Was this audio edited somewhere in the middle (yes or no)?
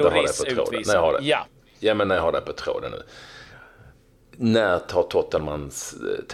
no